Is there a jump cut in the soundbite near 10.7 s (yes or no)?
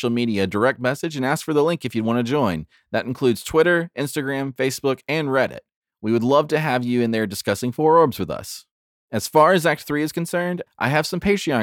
yes